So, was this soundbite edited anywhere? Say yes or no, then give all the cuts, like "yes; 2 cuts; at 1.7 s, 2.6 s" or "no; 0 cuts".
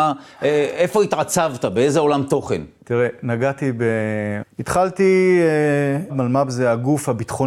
yes; 2 cuts; at 4.4 s, 6.1 s